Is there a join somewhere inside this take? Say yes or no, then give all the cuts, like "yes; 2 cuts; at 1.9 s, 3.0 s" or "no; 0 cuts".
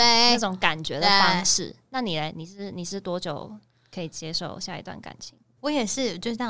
yes; 1 cut; at 5.6 s